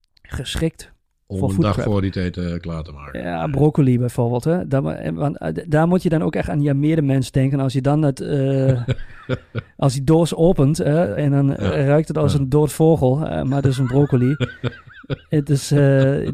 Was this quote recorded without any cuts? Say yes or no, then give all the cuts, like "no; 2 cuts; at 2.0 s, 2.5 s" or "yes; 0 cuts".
yes; 0 cuts